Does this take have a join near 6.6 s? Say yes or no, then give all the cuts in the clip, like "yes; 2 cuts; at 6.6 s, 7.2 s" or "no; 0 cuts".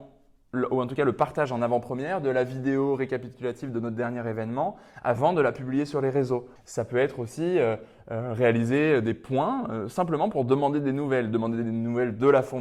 yes; 1 cut; at 6.6 s